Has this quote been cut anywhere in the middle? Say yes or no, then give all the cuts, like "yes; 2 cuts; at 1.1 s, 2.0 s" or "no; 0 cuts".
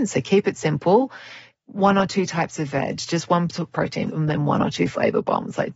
yes; 1 cut; at 4.1 s